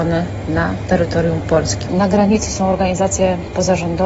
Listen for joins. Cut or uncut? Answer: cut